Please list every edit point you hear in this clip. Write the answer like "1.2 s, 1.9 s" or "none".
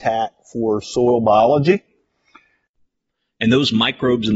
none